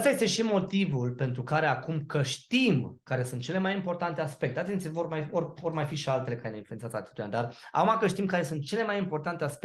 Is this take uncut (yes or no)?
yes